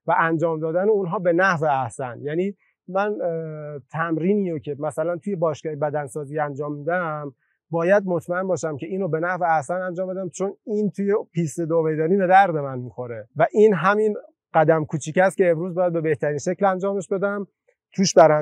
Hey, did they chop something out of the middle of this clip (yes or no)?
yes